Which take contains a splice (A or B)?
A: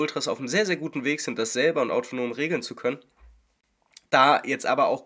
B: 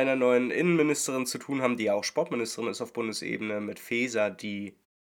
A